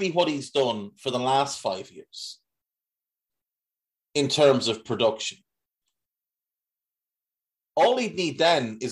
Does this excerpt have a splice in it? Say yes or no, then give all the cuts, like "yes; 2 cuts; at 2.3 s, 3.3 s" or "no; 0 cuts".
yes; 1 cut; at 7.6 s